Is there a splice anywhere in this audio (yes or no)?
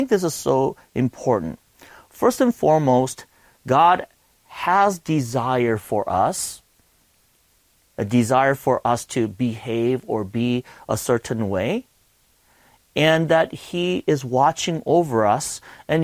no